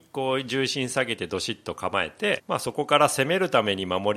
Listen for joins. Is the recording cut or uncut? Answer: cut